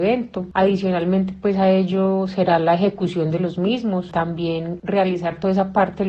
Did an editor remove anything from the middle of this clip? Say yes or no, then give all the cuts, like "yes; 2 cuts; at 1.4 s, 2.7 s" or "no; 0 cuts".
no; 0 cuts